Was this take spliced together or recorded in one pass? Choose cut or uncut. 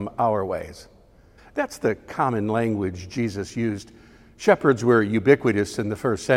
cut